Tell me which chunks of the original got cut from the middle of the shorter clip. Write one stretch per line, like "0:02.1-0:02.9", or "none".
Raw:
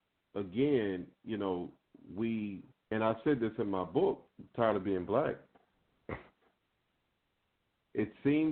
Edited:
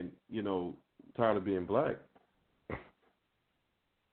0:02.1-0:04.5